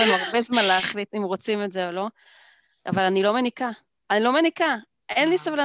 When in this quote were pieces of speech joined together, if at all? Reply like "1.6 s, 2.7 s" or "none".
1.1 s, 2.9 s